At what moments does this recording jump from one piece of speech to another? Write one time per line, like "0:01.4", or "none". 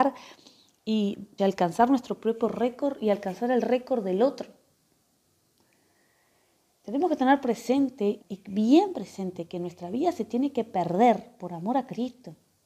0:01.4
0:08.2